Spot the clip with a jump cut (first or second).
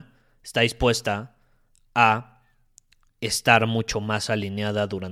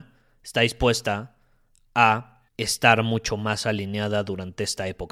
second